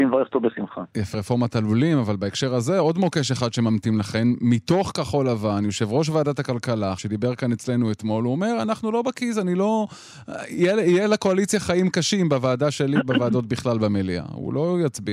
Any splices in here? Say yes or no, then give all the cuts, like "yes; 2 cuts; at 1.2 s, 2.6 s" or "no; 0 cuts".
yes; 2 cuts; at 1.1 s, 7.0 s